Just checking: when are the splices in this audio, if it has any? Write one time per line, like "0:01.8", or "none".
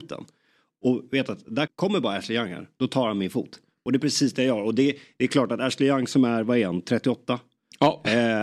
0:01.7